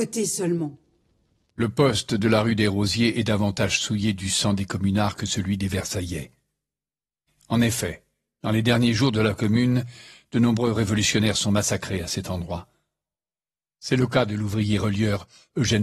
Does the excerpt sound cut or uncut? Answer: cut